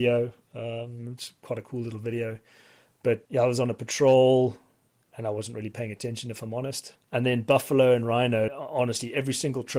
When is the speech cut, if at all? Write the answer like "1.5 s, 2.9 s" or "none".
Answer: 6.9 s, 8.5 s

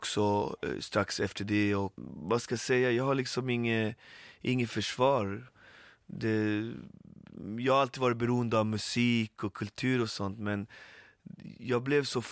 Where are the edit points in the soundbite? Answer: none

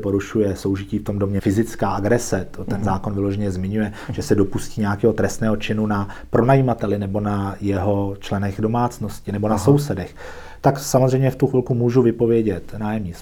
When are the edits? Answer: 1.4 s

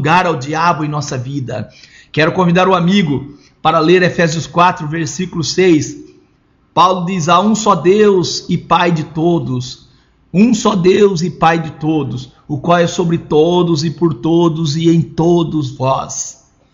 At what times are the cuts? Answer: none

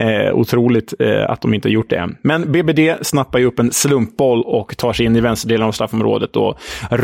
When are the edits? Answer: none

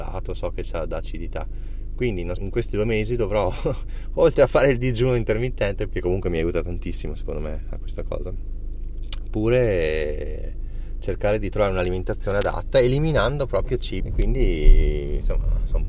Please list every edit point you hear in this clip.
2.4 s, 5.9 s, 14.0 s

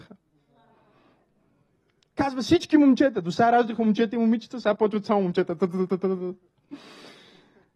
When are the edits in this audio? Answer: 2.1 s

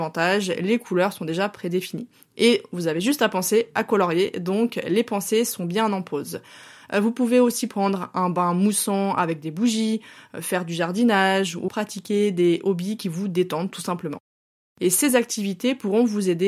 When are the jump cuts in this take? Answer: 11.7 s

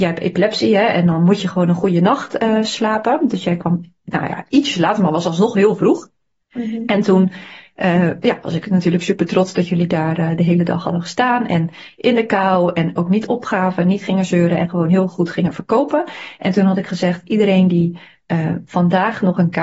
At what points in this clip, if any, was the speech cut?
none

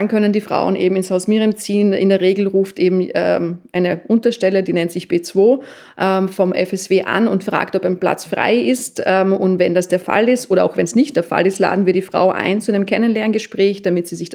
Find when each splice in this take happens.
none

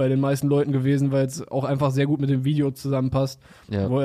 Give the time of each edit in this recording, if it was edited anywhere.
none

